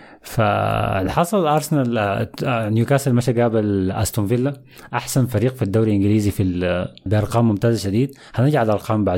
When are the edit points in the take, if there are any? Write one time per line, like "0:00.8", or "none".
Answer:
0:07.1